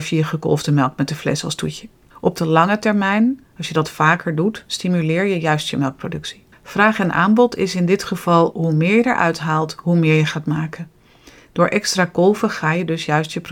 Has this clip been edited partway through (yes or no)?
yes